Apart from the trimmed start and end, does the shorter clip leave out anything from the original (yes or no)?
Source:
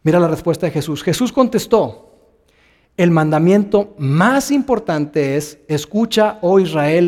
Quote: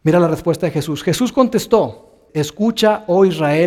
yes